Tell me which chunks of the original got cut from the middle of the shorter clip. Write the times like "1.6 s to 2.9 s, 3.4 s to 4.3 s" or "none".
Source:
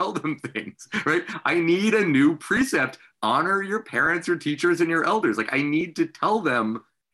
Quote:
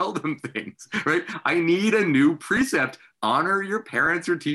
none

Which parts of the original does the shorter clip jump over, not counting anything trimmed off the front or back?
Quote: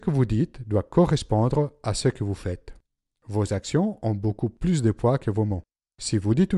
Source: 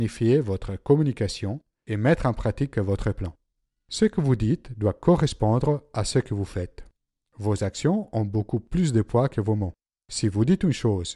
none

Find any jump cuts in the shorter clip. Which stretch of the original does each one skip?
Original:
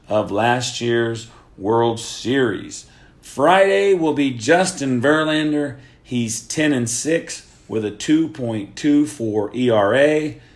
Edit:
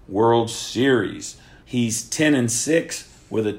3.1 s to 6.0 s

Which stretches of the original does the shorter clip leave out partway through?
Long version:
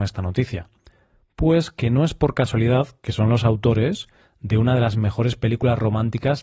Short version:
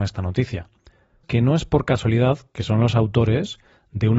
1.2 s to 1.7 s

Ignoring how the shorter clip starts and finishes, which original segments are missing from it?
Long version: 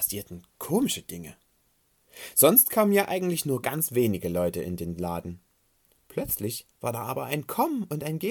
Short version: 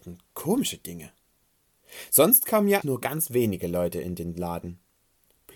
3.1 s to 3.4 s

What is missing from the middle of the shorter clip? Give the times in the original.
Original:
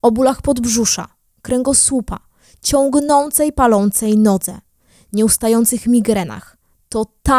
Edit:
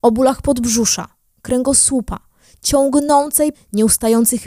3.5 s to 4.9 s

